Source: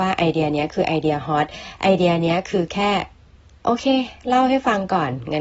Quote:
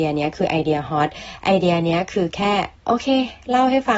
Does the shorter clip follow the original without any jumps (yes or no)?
no